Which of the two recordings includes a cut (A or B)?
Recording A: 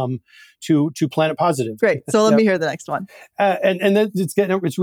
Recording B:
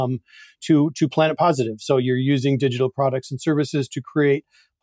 A